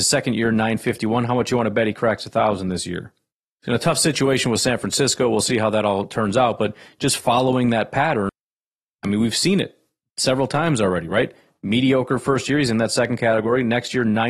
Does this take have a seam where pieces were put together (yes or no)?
no